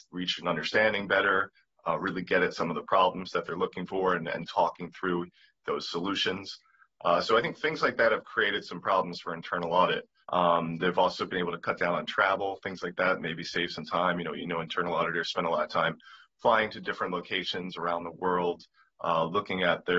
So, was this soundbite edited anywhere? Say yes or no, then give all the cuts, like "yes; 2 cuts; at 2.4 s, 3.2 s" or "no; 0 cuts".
yes; 1 cut; at 10.2 s